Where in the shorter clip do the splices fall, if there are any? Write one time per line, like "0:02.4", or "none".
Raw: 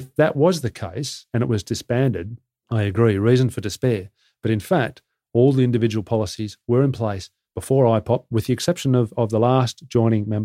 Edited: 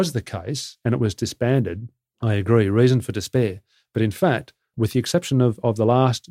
0:04.7